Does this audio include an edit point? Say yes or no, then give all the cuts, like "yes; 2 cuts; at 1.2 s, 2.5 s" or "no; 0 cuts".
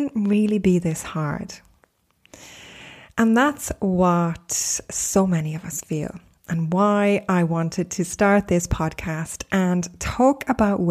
no; 0 cuts